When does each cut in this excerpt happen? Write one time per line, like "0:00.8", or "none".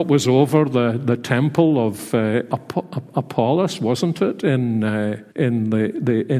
0:05.3